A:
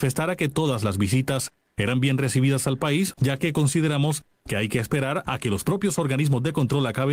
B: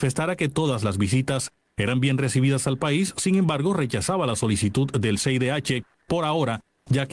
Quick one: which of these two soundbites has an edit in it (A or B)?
A